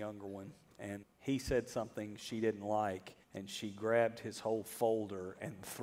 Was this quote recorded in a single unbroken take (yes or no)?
no